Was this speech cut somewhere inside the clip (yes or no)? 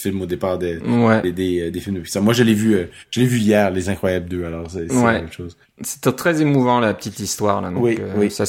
no